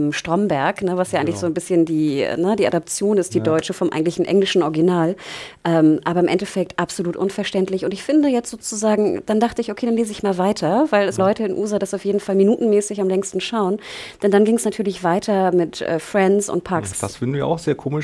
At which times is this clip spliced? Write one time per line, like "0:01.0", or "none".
0:11.2
0:16.9